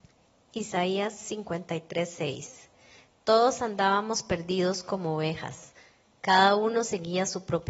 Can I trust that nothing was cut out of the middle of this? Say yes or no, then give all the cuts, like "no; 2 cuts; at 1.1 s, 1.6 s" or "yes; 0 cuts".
yes; 0 cuts